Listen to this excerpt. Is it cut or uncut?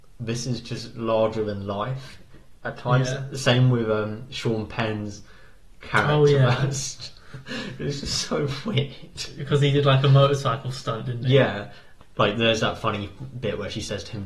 uncut